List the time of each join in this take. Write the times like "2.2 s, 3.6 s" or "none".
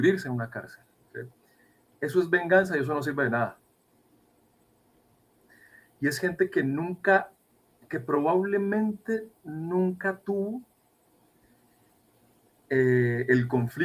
none